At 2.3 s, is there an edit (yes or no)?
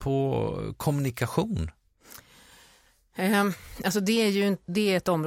no